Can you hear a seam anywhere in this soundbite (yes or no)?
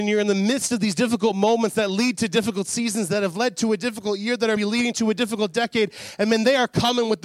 yes